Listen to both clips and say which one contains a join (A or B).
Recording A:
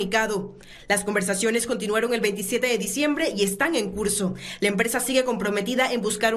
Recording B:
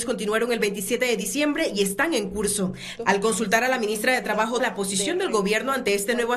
B